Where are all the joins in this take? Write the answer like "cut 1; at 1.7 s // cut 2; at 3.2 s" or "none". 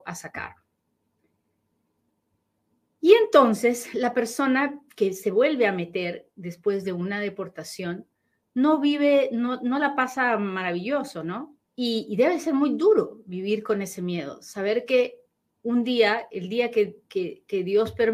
cut 1; at 11.7 s // cut 2; at 17.0 s

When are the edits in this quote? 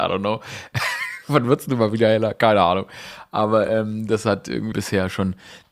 cut 1; at 4.7 s

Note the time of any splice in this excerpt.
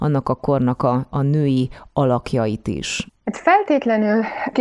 cut 1; at 3.1 s

